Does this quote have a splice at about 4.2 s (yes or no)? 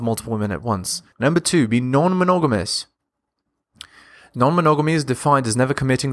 no